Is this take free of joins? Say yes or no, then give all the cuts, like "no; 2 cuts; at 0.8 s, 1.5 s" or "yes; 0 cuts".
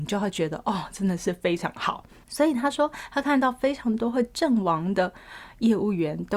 yes; 0 cuts